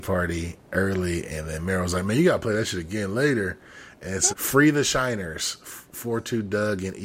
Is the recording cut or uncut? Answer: cut